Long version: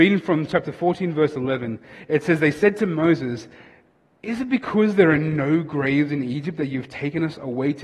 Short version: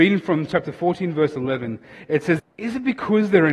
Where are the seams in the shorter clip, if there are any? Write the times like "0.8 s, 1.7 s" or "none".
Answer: 2.4 s